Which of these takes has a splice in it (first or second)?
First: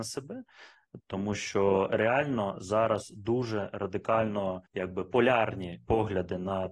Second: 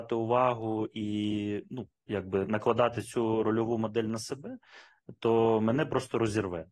first